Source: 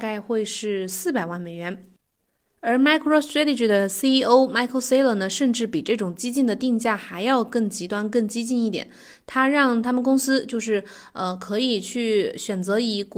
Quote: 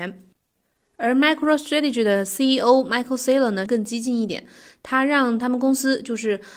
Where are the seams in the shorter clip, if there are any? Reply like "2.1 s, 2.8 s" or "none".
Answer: 3.7 s